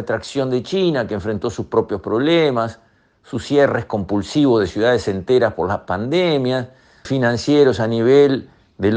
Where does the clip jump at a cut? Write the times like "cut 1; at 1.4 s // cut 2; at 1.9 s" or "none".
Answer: cut 1; at 7.1 s